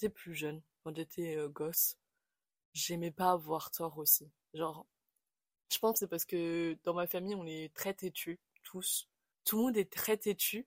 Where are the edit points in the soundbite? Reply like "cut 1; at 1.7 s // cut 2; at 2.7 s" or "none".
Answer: cut 1; at 9.3 s